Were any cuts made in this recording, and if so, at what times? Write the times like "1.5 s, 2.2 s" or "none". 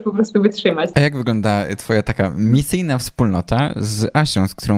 0.9 s